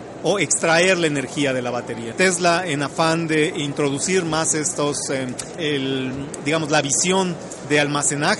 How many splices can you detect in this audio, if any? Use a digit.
2